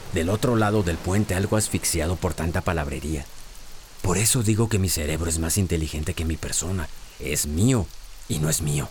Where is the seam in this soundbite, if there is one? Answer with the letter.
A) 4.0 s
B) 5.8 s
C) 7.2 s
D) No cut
C